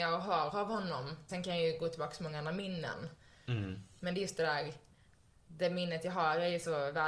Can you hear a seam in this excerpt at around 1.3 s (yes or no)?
yes